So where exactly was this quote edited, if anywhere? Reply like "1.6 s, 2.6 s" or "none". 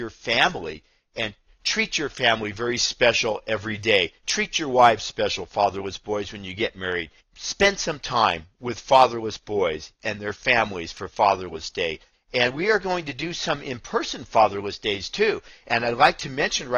7.2 s, 12.1 s